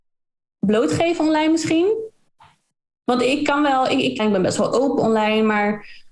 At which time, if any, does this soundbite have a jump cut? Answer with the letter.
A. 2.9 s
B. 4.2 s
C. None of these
B